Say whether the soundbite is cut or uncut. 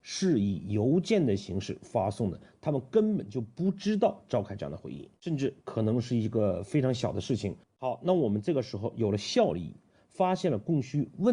cut